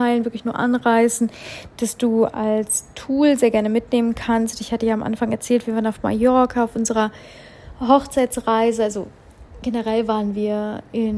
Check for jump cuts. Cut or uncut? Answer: uncut